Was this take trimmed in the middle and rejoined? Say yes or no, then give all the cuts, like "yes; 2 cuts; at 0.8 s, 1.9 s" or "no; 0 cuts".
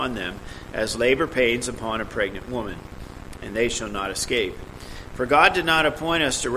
yes; 1 cut; at 5.1 s